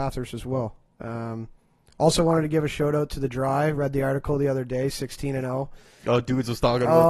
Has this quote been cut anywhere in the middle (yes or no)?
no